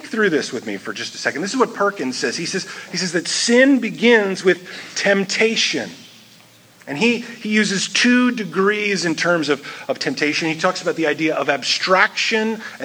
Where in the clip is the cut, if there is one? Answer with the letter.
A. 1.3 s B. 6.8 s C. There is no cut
C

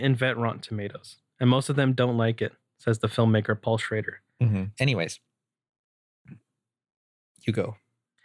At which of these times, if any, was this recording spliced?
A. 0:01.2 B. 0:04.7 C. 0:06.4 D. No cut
B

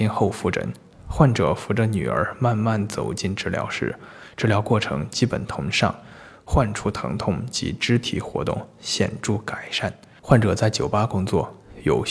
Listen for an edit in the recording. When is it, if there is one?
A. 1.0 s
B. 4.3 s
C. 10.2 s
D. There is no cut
C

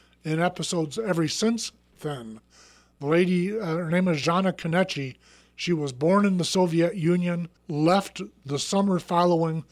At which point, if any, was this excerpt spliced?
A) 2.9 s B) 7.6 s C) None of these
B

